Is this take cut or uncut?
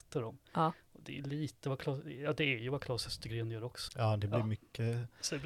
cut